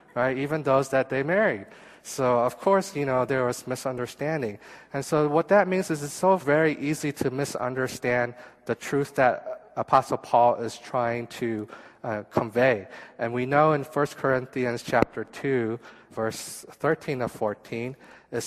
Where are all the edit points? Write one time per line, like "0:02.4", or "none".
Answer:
0:06.4
0:16.1